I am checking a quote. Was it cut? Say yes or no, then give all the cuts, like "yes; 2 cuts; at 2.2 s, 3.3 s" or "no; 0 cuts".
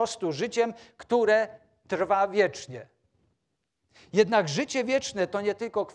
no; 0 cuts